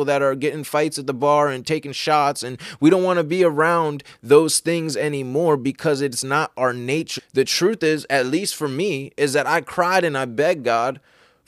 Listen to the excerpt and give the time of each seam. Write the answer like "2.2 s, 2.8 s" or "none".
7.2 s